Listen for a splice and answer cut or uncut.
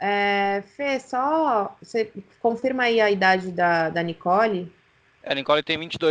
uncut